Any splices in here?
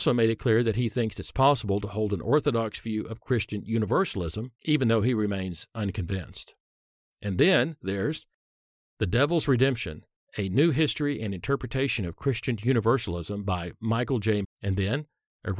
yes; 2 cuts; at 4.6 s, 14.4 s

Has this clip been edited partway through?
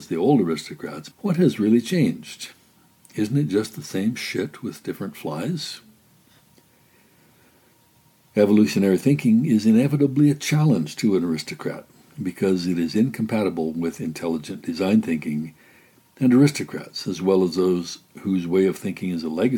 yes; 1 cut; at 1.1 s

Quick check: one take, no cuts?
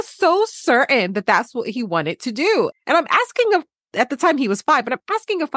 no; 1 cut; at 2.7 s

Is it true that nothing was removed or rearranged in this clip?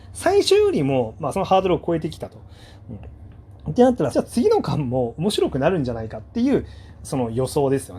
no; 2 cuts; at 1.3 s, 4.1 s

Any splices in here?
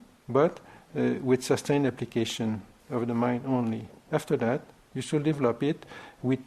no; 0 cuts

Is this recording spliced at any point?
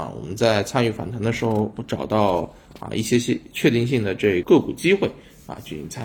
yes; 1 cut; at 4.4 s

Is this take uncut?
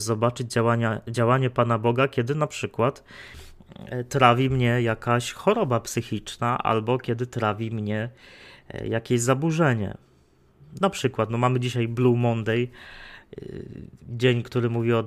yes; 0 cuts

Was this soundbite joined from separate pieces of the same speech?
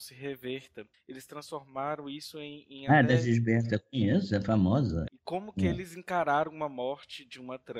yes; 2 cuts; at 0.9 s, 5.1 s

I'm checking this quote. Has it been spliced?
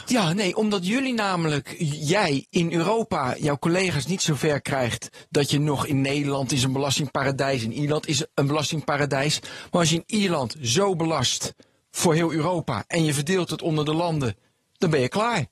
no; 0 cuts

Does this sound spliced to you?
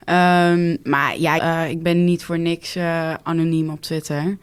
yes; 1 cut; at 1.4 s

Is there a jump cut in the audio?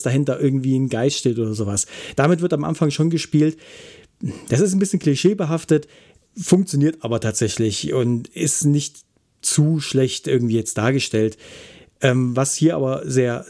no; 0 cuts

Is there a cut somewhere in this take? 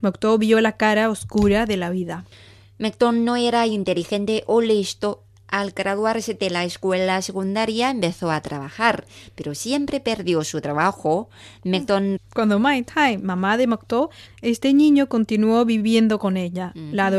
yes; 2 cuts; at 12.2 s, 14.3 s

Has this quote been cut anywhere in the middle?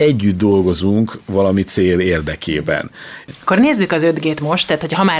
no; 0 cuts

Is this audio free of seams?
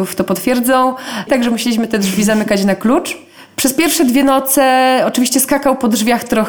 no; 1 cut; at 1.3 s

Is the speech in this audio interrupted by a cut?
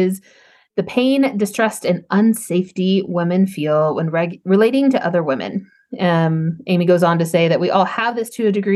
no; 0 cuts

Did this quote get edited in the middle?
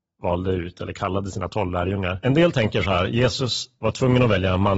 yes; 1 cut; at 2.2 s

